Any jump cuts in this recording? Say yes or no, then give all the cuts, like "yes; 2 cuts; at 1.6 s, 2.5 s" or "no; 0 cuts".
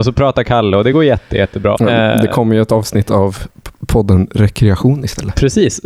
yes; 1 cut; at 1.8 s